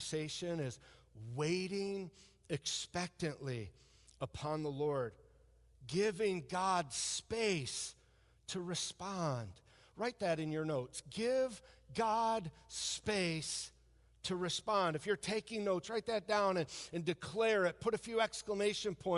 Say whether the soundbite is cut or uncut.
uncut